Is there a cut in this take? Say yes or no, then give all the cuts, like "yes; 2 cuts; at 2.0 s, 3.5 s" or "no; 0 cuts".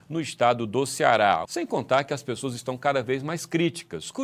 yes; 1 cut; at 1.5 s